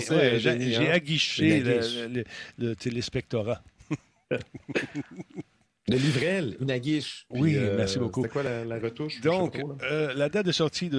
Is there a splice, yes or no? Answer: no